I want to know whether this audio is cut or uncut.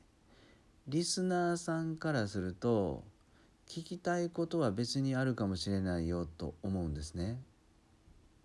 uncut